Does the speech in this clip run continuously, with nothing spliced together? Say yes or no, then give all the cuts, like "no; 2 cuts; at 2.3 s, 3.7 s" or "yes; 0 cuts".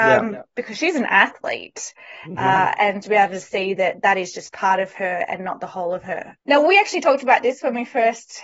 no; 2 cuts; at 3.0 s, 6.4 s